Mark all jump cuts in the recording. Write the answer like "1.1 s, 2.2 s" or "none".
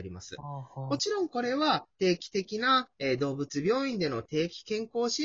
none